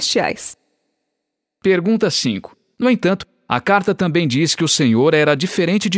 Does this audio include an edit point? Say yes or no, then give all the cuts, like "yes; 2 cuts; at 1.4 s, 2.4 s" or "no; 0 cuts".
yes; 1 cut; at 2.7 s